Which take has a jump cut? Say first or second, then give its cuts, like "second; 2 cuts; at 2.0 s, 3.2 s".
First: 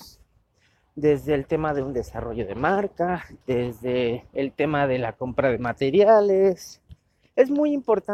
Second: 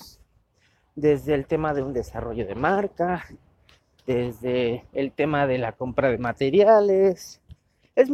first; 1 cut; at 3.4 s